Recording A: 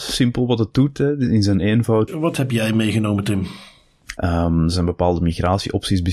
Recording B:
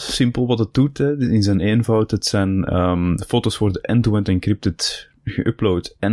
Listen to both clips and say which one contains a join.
A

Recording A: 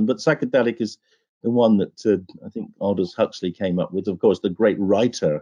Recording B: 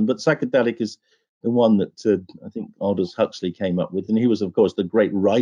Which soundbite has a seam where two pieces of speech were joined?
A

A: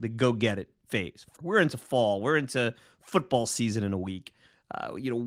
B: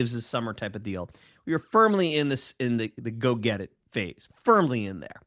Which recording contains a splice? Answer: A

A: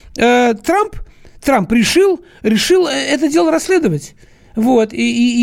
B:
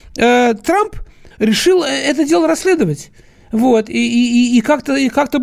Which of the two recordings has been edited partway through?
B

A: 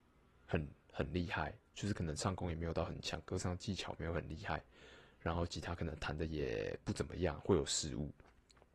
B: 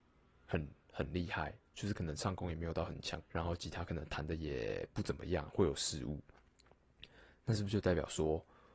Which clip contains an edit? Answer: B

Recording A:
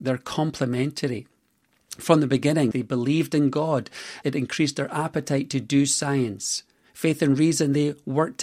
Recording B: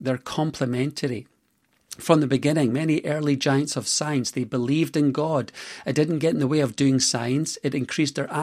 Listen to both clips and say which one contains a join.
A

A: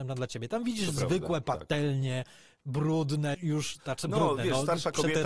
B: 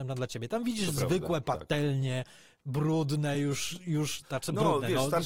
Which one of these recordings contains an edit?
A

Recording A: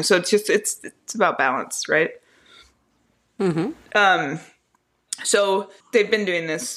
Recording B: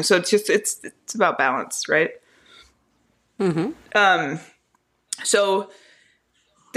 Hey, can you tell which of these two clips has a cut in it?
A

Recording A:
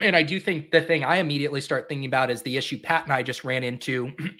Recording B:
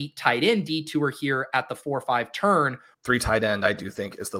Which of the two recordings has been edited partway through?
B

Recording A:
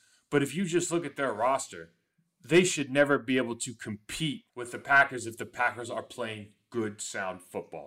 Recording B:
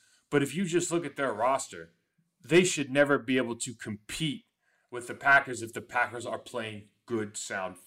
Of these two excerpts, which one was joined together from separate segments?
A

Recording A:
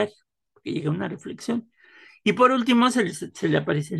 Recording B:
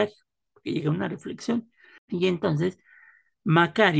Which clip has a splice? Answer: B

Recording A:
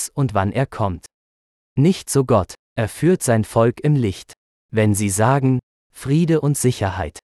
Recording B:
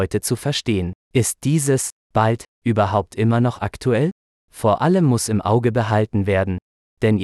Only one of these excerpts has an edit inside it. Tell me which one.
B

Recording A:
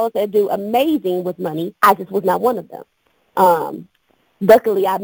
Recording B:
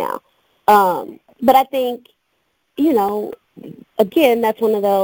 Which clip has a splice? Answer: A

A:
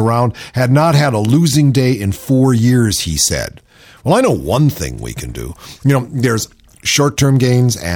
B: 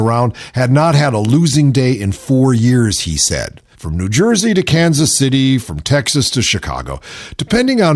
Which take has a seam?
B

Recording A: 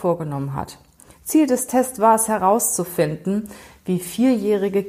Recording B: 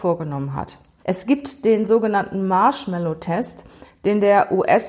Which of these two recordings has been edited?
B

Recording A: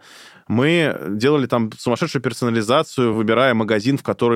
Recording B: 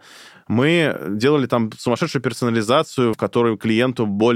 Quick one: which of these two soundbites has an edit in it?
B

